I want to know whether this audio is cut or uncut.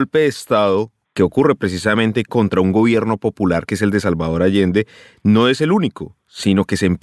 uncut